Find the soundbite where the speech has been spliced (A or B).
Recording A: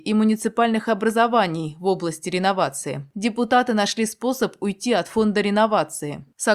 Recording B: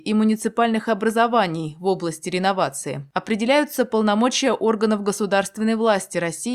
A